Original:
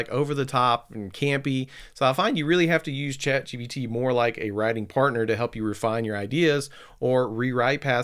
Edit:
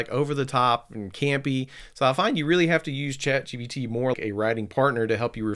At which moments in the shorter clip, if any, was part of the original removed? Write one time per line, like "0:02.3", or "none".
0:04.1